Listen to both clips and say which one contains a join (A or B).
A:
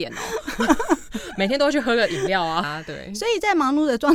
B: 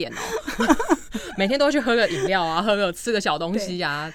A